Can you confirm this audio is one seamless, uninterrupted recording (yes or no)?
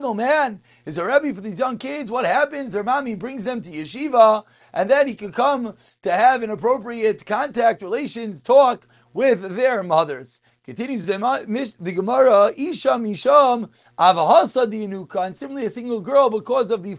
yes